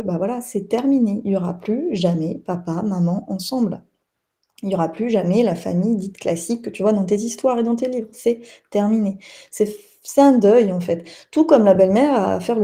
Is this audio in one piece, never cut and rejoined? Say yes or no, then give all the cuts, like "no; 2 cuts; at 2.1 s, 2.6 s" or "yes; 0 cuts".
yes; 0 cuts